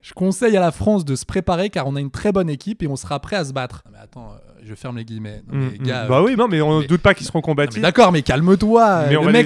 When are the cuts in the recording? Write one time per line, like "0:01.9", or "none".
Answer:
0:06.4